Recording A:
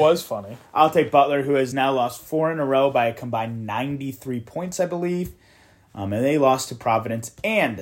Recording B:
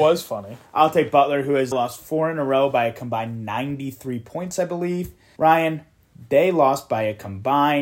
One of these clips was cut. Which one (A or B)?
B